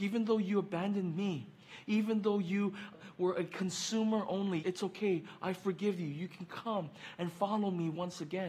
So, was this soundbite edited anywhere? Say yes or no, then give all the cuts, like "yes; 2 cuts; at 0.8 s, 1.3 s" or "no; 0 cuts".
yes; 2 cuts; at 2.9 s, 4.6 s